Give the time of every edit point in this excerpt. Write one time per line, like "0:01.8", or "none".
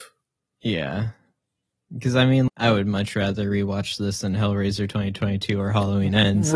0:02.5